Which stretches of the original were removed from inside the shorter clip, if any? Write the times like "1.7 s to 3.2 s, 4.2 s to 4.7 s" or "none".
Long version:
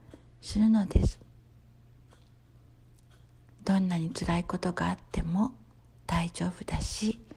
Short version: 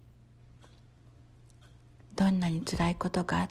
none